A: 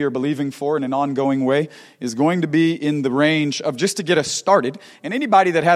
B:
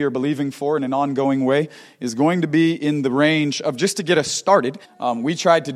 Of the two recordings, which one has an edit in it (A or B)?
B